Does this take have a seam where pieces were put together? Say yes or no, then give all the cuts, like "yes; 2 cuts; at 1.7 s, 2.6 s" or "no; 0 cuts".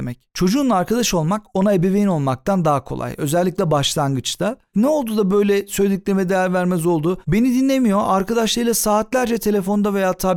yes; 1 cut; at 4.7 s